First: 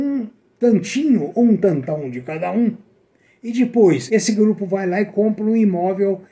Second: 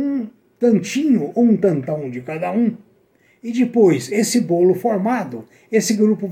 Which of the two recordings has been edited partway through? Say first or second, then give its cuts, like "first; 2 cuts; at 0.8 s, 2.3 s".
first; 1 cut; at 4.1 s